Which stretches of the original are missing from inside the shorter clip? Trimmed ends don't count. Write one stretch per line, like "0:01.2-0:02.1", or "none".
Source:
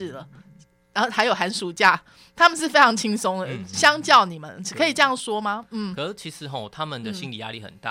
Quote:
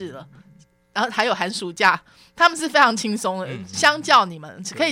none